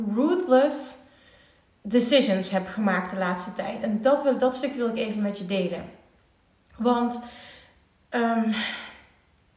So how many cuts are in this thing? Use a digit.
0